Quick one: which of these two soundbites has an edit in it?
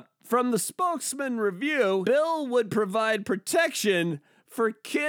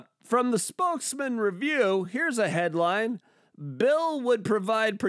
first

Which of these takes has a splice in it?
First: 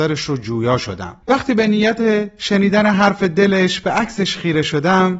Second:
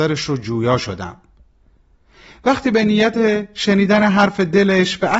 first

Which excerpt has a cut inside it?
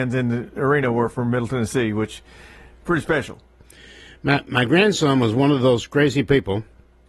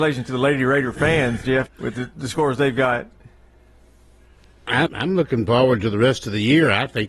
second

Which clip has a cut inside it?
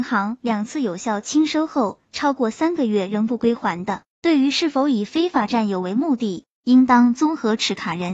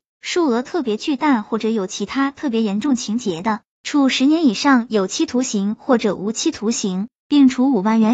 first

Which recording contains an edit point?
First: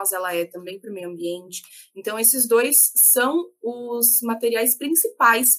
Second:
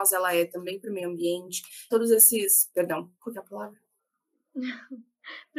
second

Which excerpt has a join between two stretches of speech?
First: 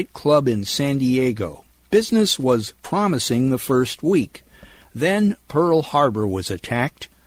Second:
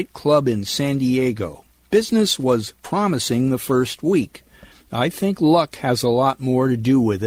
second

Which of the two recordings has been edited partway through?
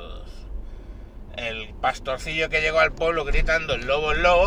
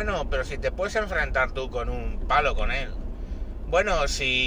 first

